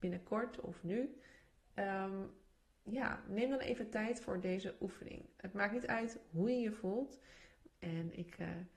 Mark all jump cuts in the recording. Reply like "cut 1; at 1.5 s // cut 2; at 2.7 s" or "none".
cut 1; at 7.7 s